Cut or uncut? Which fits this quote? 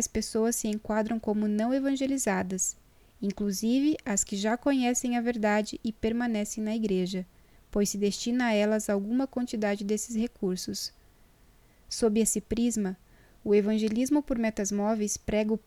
uncut